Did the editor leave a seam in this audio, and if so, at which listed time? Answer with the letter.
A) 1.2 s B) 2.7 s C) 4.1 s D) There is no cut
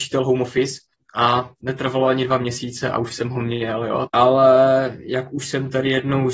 C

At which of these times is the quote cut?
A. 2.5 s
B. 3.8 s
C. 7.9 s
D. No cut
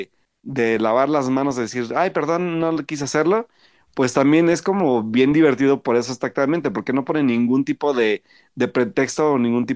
D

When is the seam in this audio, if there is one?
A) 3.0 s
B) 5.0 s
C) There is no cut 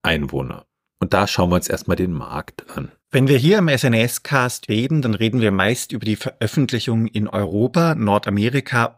A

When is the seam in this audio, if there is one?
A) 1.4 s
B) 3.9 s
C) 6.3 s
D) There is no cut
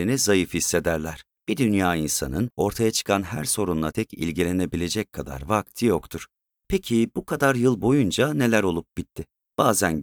B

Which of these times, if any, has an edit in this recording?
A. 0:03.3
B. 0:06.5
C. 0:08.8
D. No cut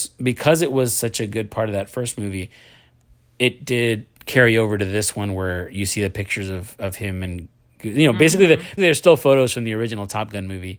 C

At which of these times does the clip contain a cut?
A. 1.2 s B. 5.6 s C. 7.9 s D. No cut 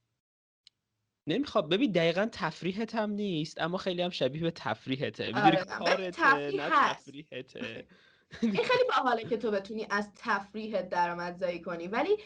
B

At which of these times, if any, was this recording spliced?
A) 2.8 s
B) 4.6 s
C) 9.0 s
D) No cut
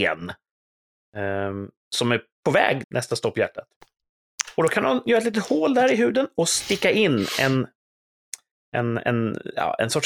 A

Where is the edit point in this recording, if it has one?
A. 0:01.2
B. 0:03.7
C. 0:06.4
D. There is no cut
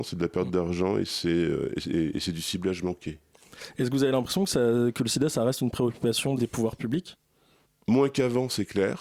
C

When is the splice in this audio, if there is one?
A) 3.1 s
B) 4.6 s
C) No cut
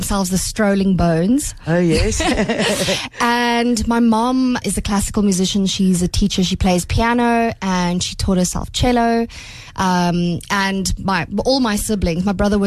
B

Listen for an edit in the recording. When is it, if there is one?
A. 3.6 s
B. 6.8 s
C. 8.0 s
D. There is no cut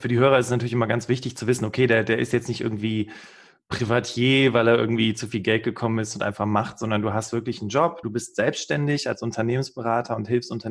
C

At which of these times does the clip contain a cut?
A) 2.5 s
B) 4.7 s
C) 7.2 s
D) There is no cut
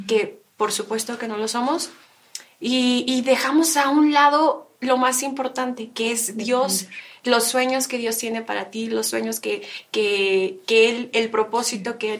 B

